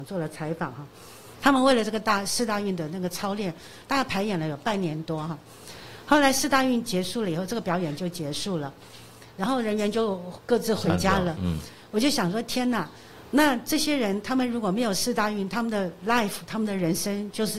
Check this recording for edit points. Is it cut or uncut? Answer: uncut